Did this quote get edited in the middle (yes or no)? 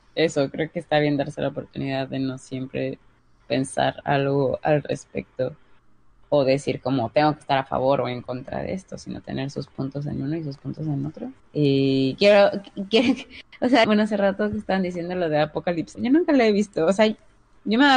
yes